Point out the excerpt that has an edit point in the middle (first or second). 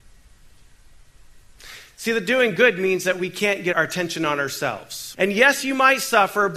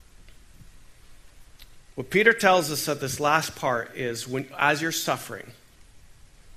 first